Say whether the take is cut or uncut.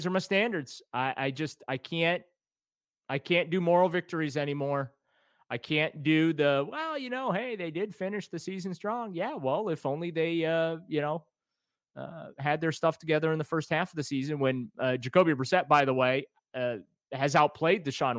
uncut